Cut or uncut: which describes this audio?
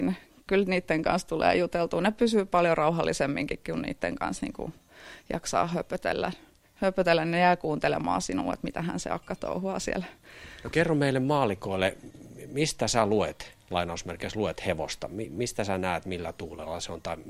uncut